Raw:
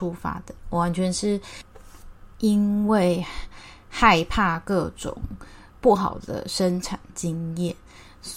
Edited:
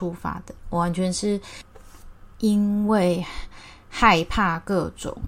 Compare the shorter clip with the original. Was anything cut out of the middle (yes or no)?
no